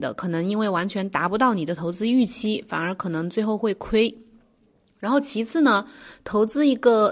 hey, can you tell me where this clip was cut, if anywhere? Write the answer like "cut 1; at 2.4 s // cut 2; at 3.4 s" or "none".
none